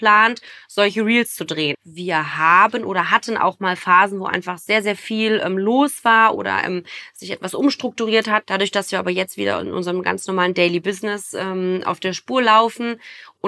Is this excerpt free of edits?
no; 2 cuts; at 1.7 s, 8.4 s

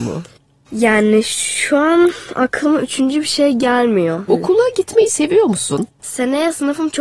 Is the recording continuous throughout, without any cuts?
no; 2 cuts; at 4.3 s, 5.9 s

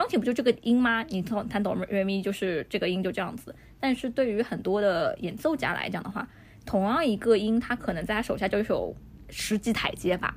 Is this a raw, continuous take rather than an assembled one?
yes; 0 cuts

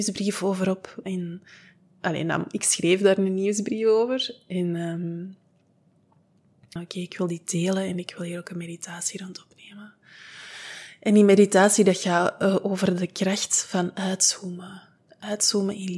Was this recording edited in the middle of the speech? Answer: yes; 1 cut; at 6.8 s

